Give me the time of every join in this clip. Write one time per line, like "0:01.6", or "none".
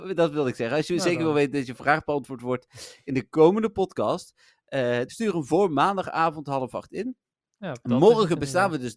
0:05.1